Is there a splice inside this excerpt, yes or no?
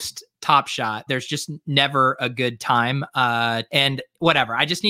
yes